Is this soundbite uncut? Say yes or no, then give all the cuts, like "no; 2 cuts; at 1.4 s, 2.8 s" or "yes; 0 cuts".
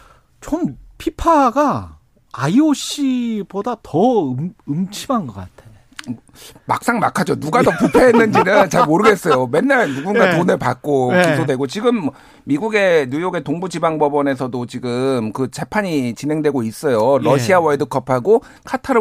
yes; 0 cuts